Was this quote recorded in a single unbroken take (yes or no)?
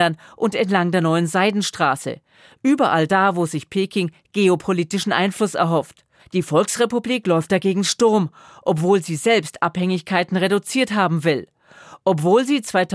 no